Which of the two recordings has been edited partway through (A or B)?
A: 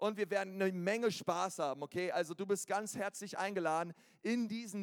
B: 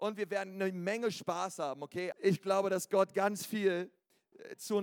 B